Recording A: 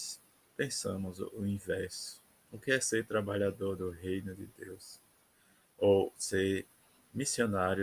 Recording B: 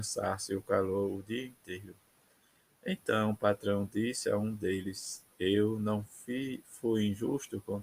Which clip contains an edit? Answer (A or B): B